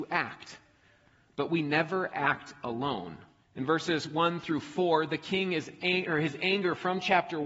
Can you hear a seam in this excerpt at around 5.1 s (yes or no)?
no